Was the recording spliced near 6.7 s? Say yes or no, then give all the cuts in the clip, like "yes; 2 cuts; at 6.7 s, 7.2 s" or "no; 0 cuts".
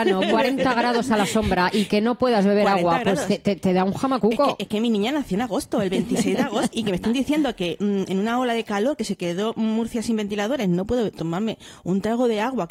yes; 1 cut; at 6.7 s